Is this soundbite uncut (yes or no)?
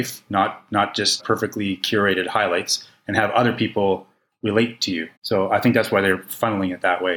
no